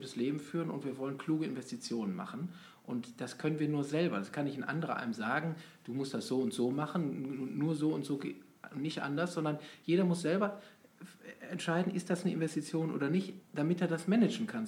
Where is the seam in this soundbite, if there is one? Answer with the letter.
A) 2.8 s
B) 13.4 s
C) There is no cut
B